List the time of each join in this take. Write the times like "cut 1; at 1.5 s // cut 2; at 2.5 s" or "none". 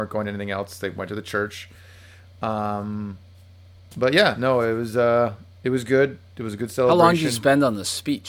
none